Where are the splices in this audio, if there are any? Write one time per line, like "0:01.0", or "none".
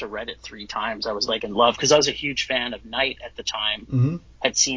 none